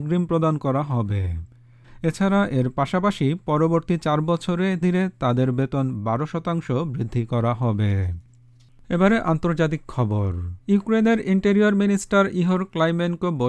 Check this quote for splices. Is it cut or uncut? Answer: cut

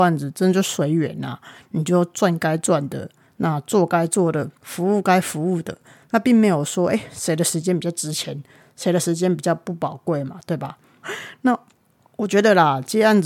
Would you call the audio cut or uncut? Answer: cut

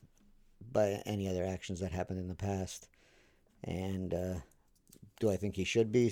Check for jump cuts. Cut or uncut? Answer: cut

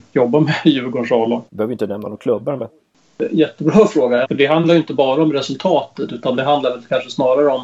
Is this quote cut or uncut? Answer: cut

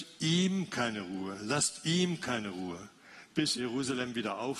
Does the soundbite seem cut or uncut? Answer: cut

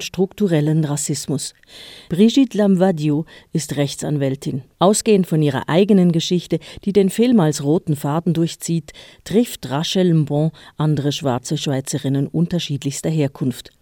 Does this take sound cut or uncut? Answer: cut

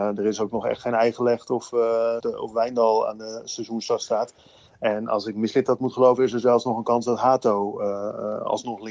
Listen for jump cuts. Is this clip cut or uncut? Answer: cut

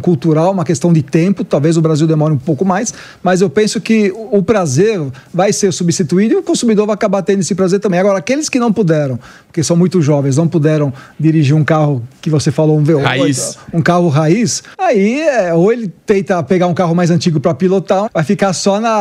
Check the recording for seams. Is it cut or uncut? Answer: cut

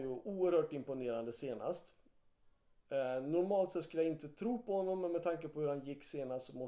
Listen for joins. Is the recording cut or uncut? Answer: uncut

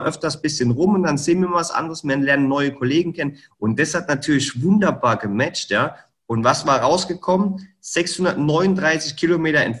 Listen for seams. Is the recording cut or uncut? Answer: cut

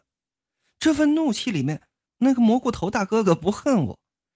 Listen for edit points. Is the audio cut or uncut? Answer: cut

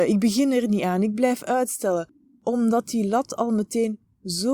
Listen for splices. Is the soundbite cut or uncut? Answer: uncut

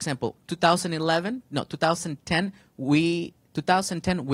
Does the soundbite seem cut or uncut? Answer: uncut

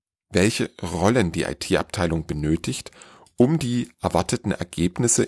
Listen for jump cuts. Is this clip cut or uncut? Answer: uncut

